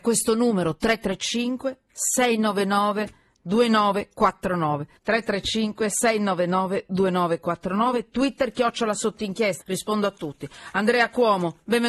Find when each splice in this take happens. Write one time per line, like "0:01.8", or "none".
0:05.0
0:09.6